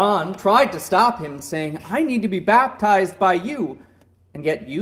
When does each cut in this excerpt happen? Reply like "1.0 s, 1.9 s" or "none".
none